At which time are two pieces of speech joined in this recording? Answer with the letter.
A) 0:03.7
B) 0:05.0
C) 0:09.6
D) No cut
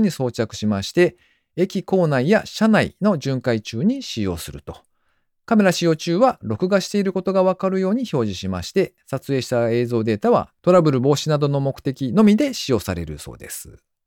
D